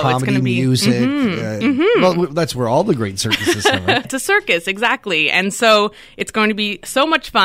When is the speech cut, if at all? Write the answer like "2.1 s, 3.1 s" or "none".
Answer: 1.6 s, 4.0 s